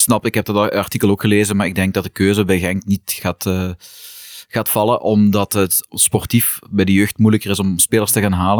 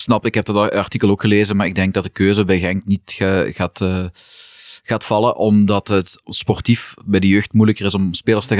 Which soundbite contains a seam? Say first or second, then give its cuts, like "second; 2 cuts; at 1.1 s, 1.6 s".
first; 1 cut; at 3.2 s